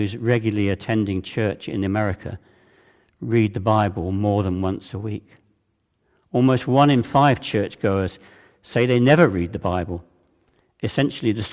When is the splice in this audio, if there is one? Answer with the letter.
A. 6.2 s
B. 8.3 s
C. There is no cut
C